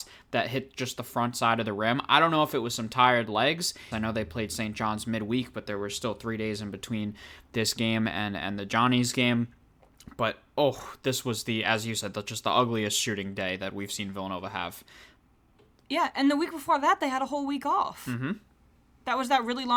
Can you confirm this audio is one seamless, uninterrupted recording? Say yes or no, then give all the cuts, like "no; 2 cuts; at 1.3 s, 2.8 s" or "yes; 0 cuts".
no; 1 cut; at 3.9 s